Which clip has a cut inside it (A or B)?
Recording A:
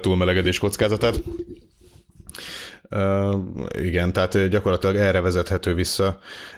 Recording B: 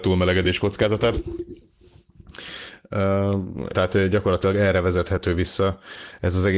B